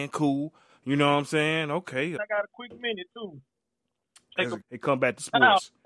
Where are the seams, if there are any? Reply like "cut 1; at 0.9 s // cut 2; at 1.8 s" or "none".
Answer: cut 1; at 2.2 s // cut 2; at 4.6 s